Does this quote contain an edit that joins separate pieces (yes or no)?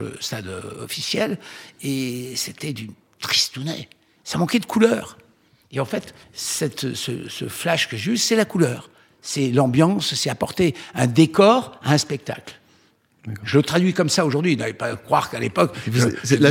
no